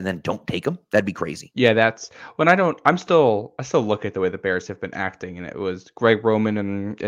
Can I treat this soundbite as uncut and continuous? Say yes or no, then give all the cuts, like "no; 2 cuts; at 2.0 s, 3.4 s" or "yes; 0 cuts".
yes; 0 cuts